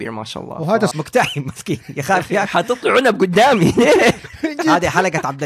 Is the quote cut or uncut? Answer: cut